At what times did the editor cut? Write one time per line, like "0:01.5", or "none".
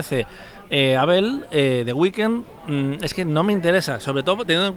none